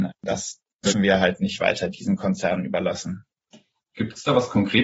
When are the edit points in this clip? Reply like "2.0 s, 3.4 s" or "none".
3.9 s